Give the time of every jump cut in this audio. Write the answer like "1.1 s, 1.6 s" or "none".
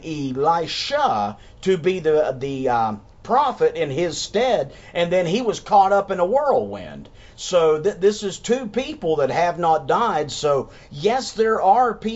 none